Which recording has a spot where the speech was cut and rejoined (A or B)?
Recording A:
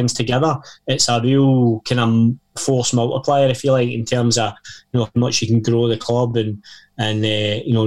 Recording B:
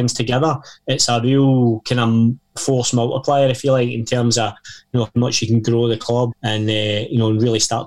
B